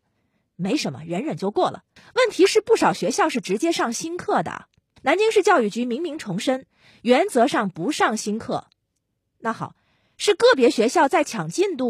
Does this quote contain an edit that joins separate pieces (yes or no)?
no